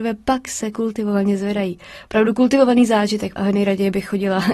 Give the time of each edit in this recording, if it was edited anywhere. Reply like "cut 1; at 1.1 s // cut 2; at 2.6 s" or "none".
cut 1; at 3.4 s